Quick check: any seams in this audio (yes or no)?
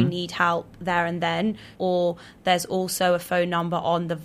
yes